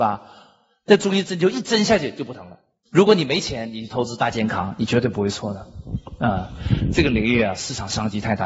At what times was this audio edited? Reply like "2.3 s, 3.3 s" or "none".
2.9 s